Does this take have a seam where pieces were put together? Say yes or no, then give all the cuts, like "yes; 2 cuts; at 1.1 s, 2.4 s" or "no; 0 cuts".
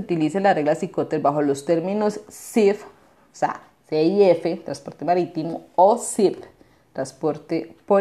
no; 0 cuts